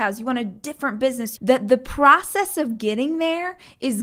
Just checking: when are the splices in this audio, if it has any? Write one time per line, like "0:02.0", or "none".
0:01.4